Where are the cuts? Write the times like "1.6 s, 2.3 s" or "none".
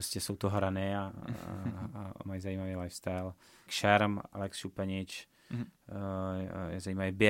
3.7 s